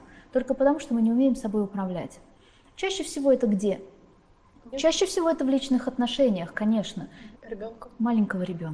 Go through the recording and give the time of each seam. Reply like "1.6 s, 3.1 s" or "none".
4.7 s, 7.3 s